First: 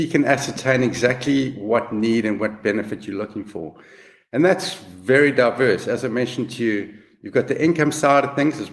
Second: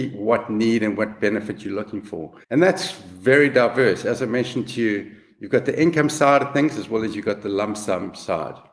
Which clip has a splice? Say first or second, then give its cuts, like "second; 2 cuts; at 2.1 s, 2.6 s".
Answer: second; 1 cut; at 2.4 s